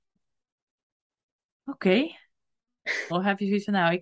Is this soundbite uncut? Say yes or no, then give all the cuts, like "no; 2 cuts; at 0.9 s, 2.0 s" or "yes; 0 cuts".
no; 1 cut; at 3.1 s